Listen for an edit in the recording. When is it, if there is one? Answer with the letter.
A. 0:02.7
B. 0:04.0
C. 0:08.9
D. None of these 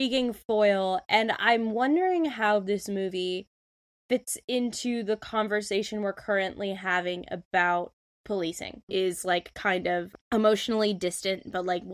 C